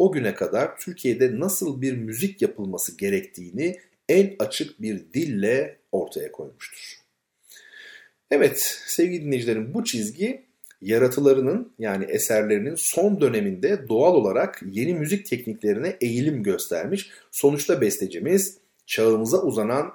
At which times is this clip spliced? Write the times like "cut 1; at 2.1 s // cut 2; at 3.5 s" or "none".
none